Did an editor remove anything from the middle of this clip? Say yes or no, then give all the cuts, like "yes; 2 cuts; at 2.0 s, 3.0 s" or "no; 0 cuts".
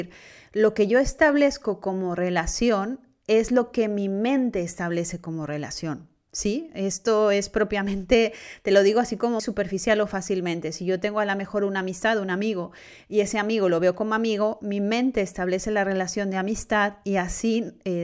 yes; 1 cut; at 9.4 s